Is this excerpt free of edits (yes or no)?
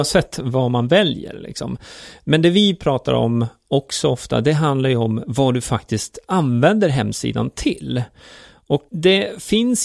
no